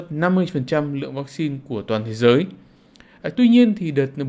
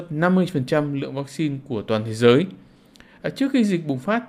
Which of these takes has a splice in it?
first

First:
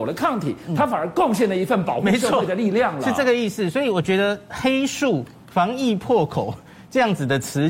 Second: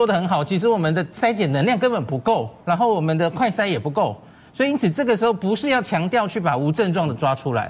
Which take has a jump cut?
second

